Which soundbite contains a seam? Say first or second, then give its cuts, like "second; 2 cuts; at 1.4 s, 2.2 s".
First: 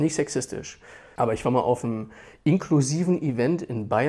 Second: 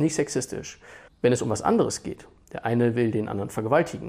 second; 1 cut; at 1.1 s